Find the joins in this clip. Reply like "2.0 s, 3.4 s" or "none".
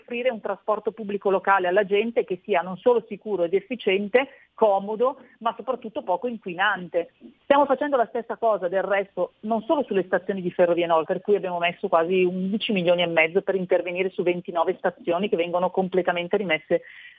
7.4 s, 11.1 s